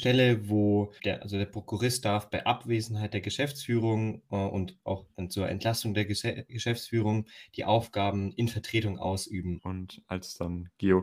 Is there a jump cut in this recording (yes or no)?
yes